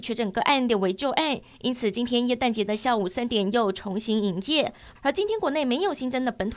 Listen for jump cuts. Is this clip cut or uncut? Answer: cut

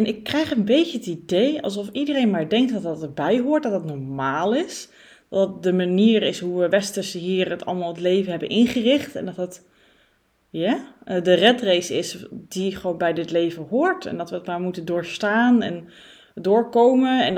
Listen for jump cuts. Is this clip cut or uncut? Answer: uncut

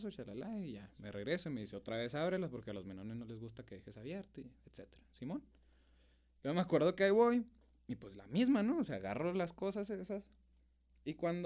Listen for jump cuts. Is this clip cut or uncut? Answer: uncut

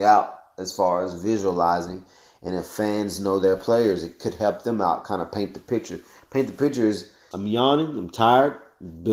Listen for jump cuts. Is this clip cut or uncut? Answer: cut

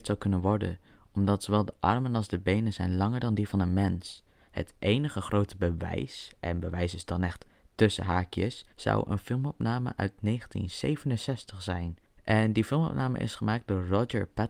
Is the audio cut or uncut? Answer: cut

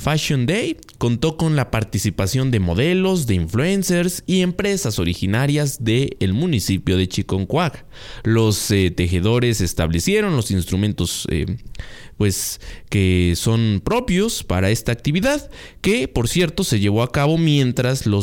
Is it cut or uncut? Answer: uncut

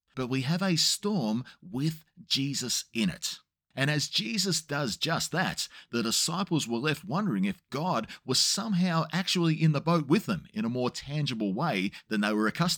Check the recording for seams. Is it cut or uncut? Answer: cut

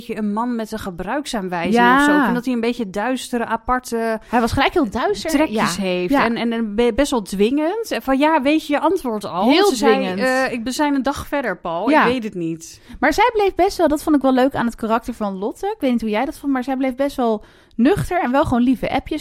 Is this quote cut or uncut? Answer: uncut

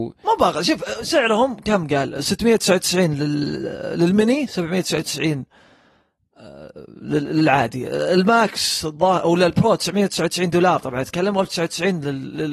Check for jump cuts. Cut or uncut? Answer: uncut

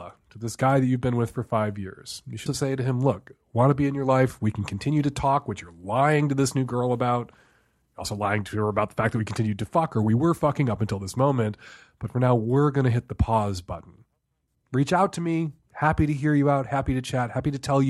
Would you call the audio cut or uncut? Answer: cut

